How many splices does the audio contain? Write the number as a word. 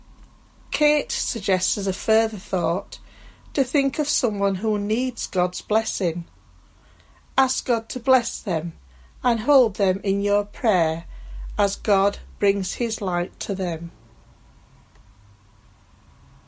zero